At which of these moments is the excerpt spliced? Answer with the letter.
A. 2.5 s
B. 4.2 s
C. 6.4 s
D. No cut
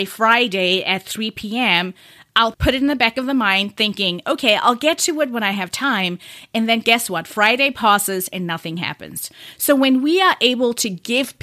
A